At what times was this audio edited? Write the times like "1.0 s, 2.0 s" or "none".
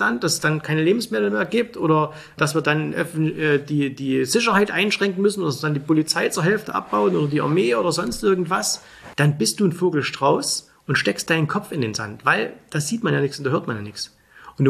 9.1 s